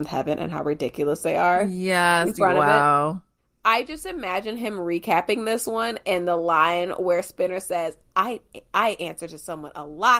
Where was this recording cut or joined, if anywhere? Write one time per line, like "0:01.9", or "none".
none